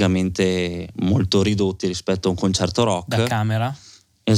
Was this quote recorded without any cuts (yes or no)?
yes